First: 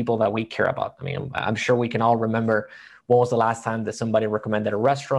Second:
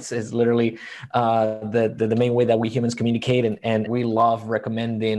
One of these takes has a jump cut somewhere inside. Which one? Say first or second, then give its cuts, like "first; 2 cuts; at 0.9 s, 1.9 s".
second; 1 cut; at 3.9 s